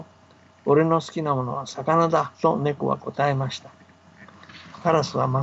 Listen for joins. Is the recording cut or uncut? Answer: cut